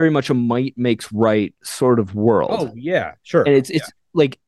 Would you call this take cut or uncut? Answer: uncut